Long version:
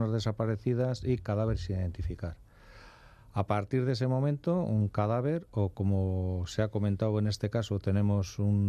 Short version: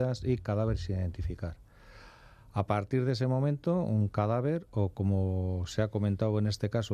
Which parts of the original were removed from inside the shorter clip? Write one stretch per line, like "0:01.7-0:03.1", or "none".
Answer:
none